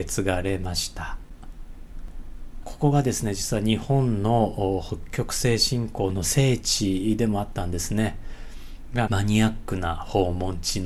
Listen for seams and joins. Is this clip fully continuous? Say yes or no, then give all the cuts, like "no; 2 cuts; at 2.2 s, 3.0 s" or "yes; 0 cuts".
no; 2 cuts; at 2.6 s, 9.1 s